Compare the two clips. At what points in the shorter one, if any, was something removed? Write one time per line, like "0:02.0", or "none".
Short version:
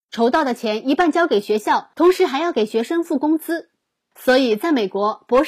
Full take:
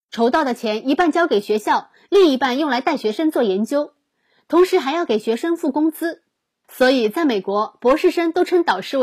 0:01.9